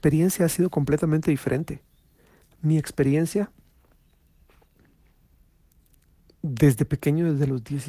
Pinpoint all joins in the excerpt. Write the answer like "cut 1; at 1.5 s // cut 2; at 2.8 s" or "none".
none

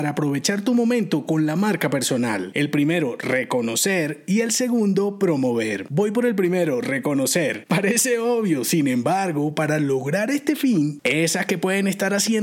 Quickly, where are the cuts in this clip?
cut 1; at 7.7 s // cut 2; at 11.0 s

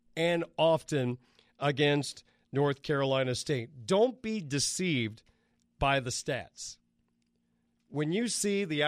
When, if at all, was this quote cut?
none

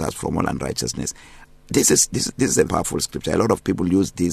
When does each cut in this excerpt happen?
cut 1; at 2.7 s

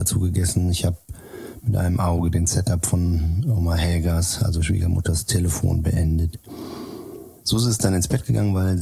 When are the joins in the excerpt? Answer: none

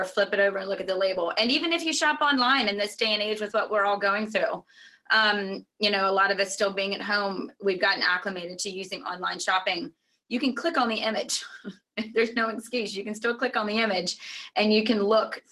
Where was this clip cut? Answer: none

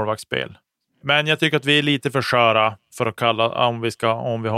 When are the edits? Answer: cut 1; at 1.0 s

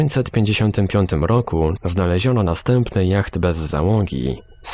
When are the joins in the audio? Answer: cut 1; at 1.8 s

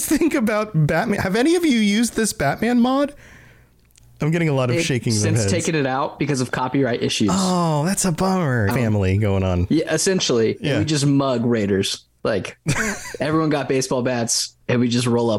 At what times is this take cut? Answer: cut 1; at 8.7 s

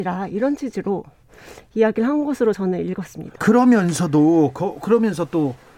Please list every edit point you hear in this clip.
cut 1; at 3.4 s

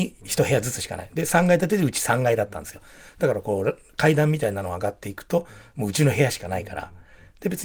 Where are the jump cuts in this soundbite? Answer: none

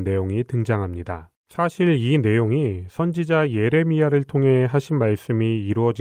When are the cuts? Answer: cut 1; at 1.4 s

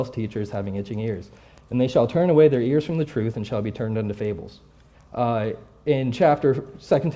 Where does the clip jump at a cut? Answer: cut 1; at 4.9 s

